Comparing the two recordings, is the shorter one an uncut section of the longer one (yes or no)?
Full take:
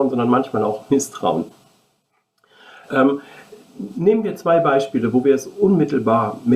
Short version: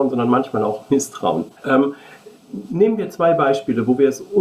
no